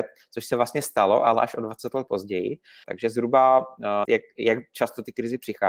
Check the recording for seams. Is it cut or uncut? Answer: cut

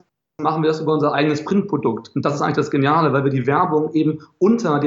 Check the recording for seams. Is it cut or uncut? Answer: uncut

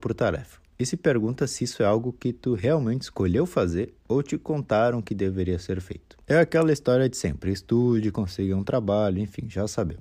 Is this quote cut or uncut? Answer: uncut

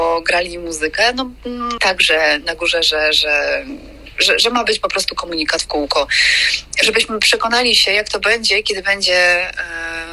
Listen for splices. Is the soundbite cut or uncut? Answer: cut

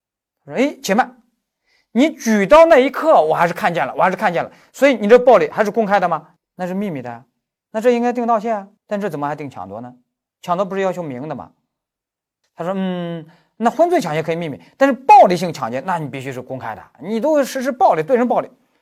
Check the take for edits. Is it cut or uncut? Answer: cut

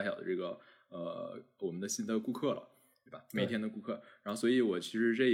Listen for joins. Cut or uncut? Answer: uncut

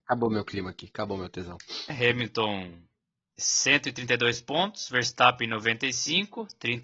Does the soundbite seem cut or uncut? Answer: cut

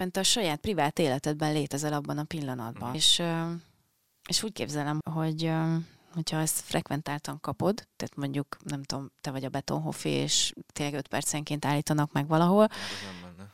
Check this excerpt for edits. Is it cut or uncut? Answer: cut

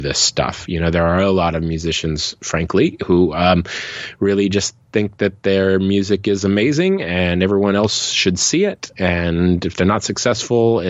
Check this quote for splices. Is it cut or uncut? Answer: uncut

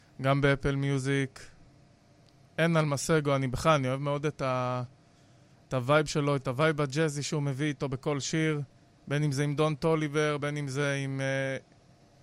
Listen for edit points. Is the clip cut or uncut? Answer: uncut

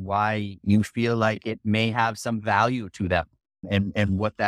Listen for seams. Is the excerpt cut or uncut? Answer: uncut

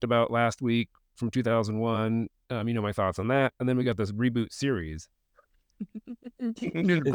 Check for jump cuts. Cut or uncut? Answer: uncut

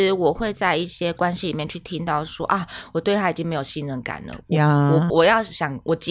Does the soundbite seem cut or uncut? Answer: cut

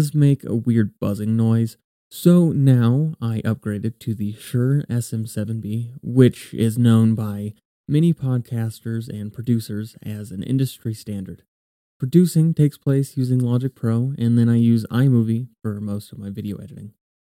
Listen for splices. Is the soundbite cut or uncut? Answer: uncut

